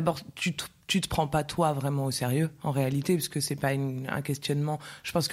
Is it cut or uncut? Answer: uncut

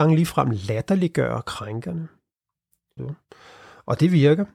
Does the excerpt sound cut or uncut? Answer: cut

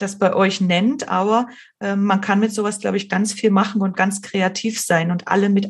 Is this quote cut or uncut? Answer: uncut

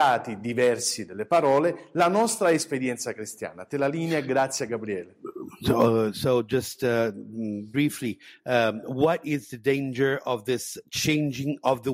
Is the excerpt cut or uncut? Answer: uncut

